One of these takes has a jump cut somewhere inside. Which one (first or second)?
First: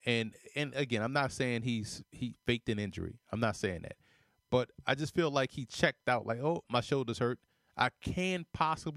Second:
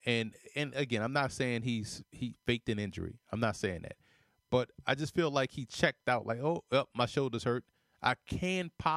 first